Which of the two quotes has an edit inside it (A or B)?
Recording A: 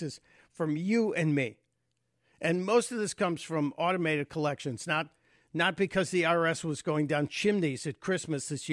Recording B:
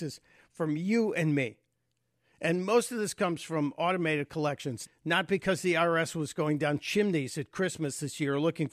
B